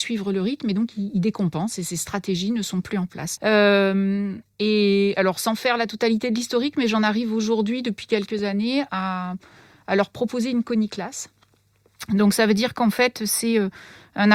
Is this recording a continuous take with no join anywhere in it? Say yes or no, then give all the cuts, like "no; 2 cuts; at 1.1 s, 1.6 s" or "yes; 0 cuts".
no; 1 cut; at 3.4 s